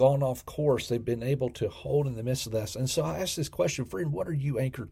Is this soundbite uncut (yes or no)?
yes